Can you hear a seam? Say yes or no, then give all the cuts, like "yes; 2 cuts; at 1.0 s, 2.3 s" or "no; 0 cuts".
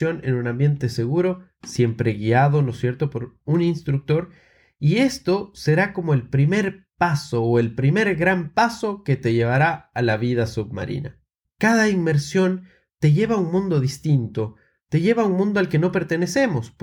yes; 1 cut; at 11.4 s